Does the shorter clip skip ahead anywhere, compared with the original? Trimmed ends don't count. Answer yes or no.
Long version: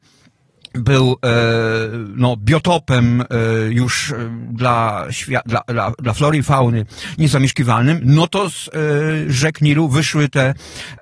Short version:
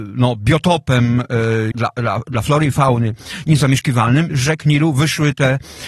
yes